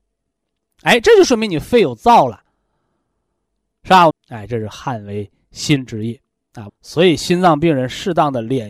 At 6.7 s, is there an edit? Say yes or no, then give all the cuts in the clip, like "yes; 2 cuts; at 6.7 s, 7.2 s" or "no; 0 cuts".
yes; 2 cuts; at 4.1 s, 6.7 s